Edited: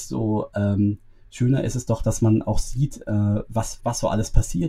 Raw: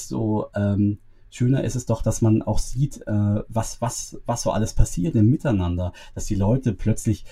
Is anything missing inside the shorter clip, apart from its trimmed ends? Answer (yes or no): yes